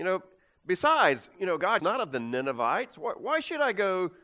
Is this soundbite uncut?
no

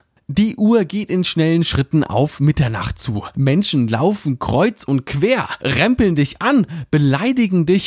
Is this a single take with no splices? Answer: yes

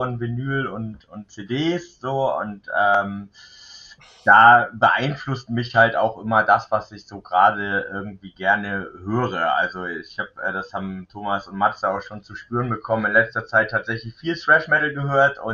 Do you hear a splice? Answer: no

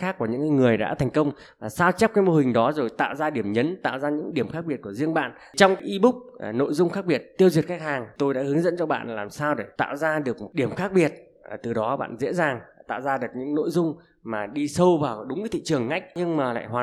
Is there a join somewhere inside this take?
no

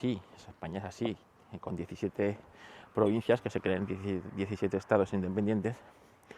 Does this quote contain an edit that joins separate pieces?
no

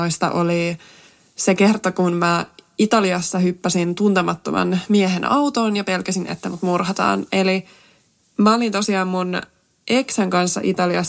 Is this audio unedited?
yes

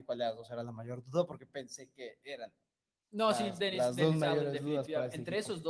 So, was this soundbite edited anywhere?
no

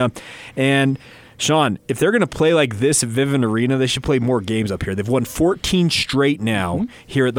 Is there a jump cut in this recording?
no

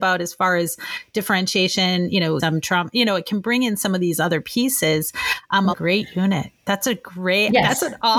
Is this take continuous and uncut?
no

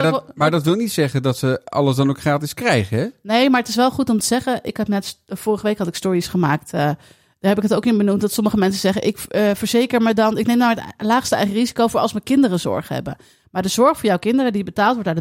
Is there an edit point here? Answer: no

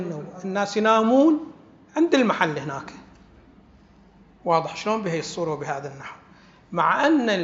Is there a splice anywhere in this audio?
no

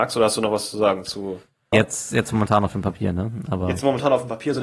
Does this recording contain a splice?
yes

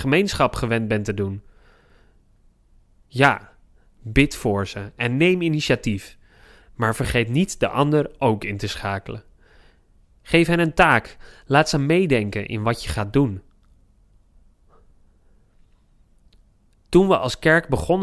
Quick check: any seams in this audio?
no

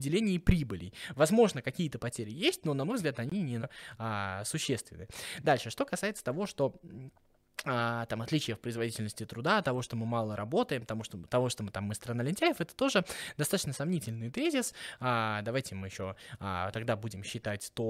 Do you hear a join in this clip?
yes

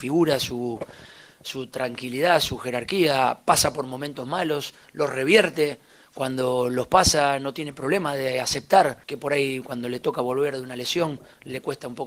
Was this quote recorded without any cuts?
no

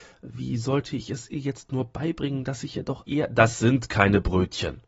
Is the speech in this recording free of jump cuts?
no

